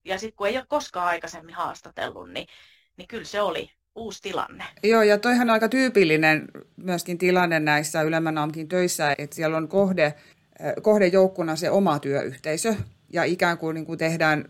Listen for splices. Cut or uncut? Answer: cut